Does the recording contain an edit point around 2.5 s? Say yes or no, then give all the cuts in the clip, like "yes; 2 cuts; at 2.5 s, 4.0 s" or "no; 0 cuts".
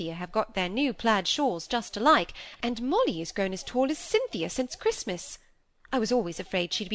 yes; 1 cut; at 2.5 s